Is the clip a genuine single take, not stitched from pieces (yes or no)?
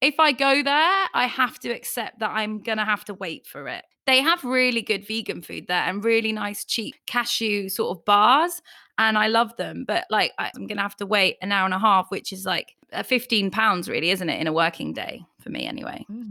no